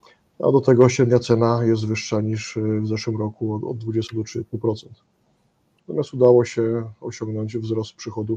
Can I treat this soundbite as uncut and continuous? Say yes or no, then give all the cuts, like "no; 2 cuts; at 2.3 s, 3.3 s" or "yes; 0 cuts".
no; 1 cut; at 5.8 s